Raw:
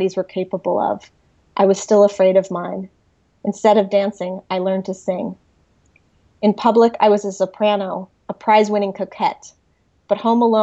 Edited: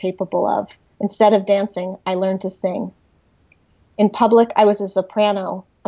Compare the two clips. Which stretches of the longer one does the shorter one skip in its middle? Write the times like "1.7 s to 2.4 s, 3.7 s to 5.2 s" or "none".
1.3 s to 3.4 s